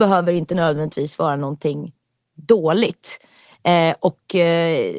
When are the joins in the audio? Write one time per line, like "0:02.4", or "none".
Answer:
none

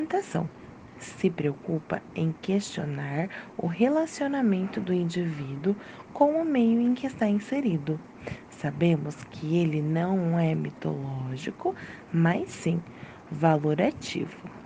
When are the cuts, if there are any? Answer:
0:12.1

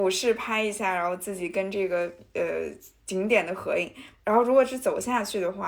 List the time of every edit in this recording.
0:04.1

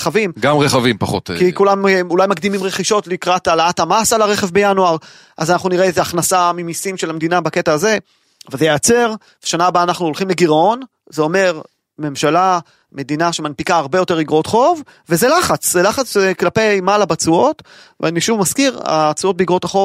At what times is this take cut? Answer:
none

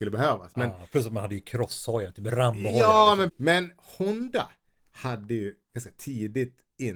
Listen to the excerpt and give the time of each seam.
0:03.3

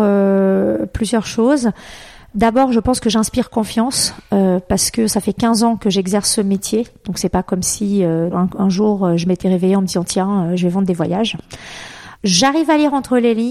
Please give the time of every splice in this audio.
0:08.3
0:12.2

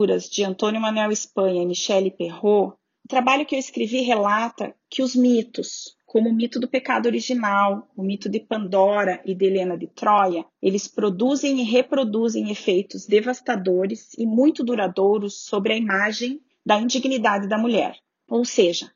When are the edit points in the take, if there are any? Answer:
none

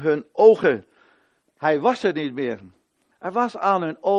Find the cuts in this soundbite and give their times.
0:01.5
0:03.1

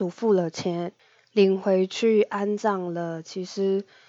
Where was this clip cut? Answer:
none

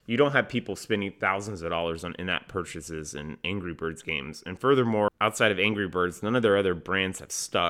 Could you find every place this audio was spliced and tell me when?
0:05.1

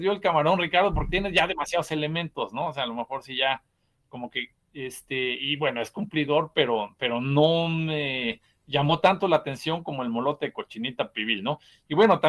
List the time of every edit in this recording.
0:04.5

